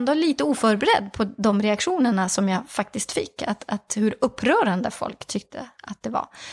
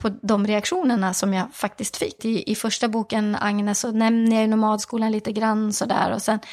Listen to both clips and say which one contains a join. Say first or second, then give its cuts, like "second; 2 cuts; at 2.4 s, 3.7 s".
second; 1 cut; at 2.2 s